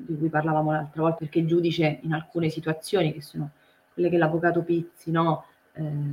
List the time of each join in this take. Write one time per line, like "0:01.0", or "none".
0:01.2